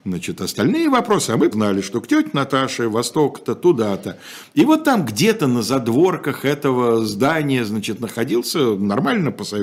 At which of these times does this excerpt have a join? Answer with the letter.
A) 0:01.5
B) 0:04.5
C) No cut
A